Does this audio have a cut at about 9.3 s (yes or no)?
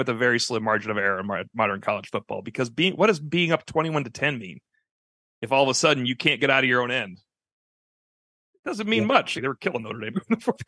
yes